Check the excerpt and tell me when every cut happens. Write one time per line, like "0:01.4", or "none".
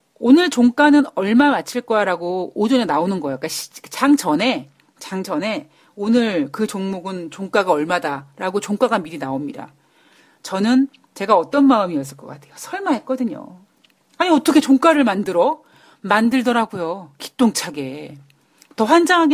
none